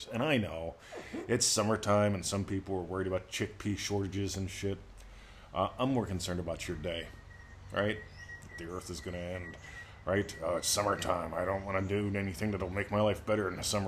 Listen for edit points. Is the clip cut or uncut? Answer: cut